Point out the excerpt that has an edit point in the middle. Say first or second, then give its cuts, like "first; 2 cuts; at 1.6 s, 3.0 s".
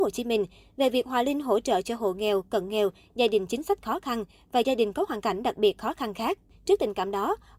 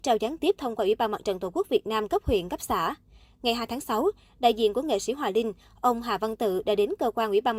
first; 1 cut; at 6.5 s